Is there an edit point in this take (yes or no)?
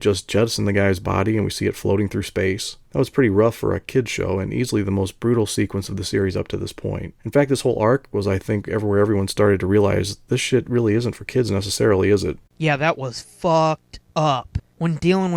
yes